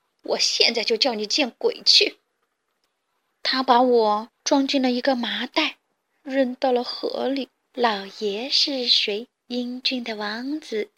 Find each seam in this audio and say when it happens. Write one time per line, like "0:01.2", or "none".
0:07.7